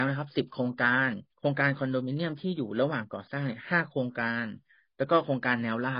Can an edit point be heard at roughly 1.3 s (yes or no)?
yes